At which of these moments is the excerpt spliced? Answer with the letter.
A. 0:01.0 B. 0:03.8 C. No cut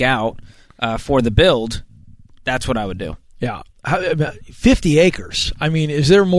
C